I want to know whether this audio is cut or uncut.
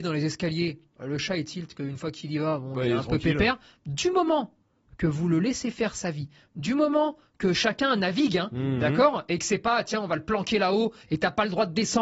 uncut